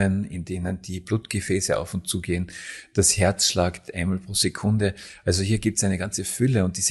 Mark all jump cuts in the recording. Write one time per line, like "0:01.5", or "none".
none